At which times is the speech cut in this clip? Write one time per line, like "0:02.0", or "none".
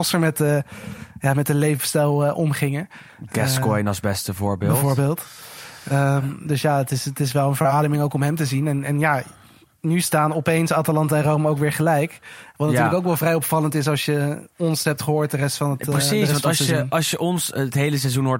none